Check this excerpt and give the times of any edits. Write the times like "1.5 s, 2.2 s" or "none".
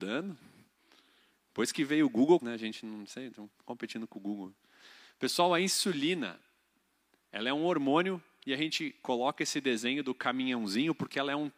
2.4 s